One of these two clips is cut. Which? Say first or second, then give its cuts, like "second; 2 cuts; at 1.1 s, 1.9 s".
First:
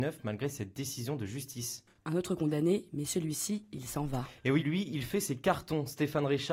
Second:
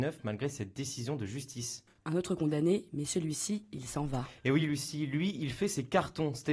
first; 1 cut; at 4.6 s